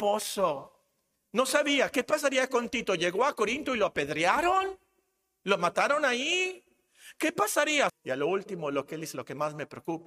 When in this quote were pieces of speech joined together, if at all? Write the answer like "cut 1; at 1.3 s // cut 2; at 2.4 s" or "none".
cut 1; at 7.9 s